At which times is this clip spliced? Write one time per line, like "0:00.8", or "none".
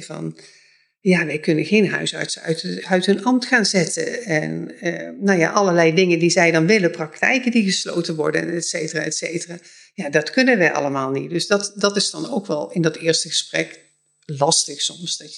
none